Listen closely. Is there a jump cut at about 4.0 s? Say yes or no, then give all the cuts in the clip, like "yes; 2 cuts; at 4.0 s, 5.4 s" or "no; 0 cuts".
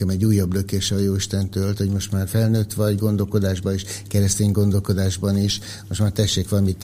no; 1 cut; at 1.8 s